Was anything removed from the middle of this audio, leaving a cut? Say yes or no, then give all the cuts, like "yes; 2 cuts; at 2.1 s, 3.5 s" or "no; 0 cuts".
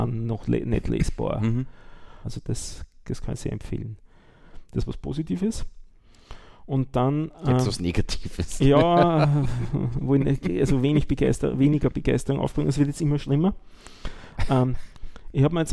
yes; 1 cut; at 2.2 s